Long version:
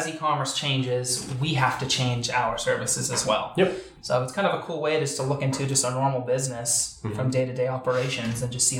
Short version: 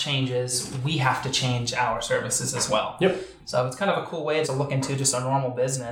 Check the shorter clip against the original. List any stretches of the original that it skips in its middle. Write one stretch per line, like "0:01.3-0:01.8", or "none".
0:05.0-0:05.1